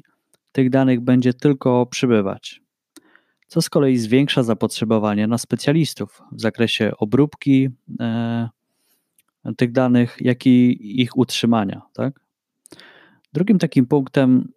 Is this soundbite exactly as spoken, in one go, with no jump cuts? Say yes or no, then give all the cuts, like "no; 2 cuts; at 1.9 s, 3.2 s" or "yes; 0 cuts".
yes; 0 cuts